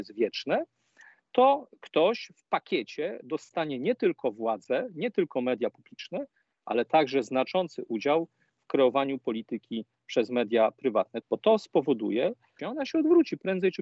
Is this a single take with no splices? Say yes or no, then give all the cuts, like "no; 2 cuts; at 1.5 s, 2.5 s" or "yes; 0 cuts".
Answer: no; 2 cuts; at 11.2 s, 12.6 s